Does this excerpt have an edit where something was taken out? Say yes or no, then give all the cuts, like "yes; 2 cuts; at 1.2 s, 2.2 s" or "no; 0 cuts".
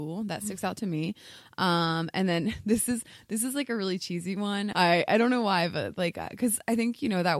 yes; 1 cut; at 4.7 s